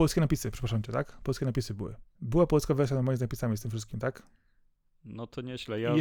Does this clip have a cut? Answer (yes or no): yes